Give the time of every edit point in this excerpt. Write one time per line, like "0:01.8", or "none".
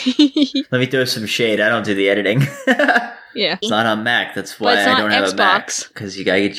0:03.6